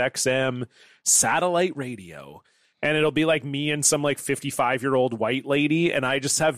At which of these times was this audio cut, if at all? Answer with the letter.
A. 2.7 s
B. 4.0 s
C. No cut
A